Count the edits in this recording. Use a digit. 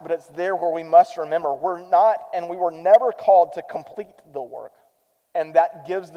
1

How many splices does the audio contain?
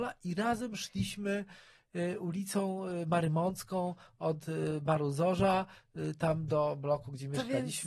0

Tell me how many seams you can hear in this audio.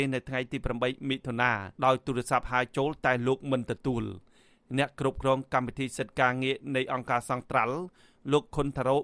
1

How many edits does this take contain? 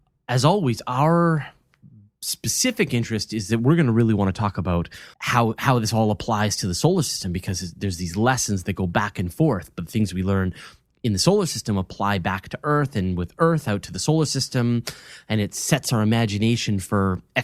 1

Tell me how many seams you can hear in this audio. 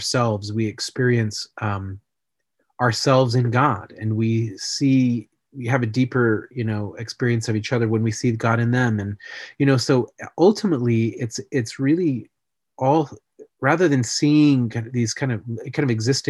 0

